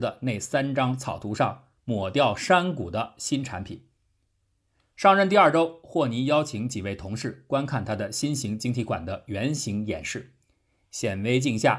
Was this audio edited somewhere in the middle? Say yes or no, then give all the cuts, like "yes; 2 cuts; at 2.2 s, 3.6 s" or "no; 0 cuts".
no; 0 cuts